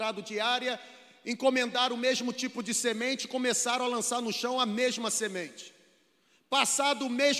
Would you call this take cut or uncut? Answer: uncut